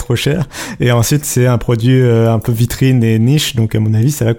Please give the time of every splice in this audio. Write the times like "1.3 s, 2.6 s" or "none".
none